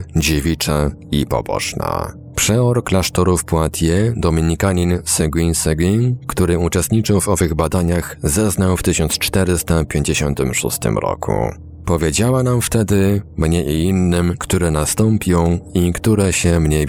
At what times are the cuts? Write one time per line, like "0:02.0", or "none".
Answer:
0:14.4